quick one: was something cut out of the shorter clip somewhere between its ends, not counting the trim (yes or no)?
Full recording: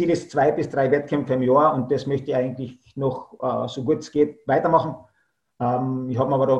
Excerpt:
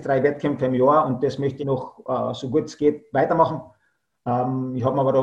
yes